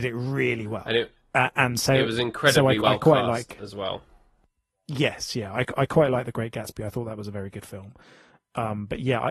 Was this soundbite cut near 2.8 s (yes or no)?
no